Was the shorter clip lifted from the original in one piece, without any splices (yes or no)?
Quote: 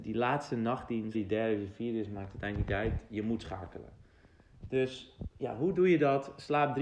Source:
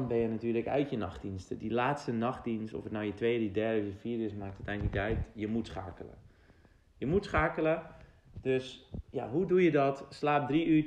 no